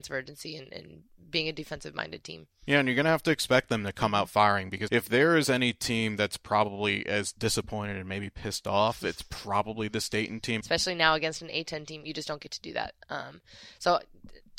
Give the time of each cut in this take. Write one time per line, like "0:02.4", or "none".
0:04.9
0:10.6